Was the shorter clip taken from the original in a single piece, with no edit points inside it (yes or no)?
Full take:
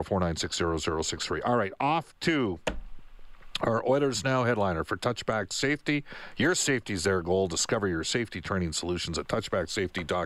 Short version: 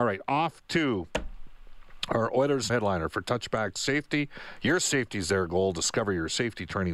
no